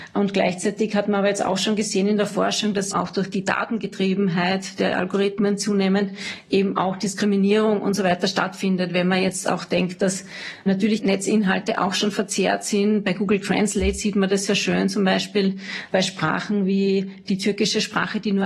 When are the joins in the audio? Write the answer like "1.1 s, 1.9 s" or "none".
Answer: 2.9 s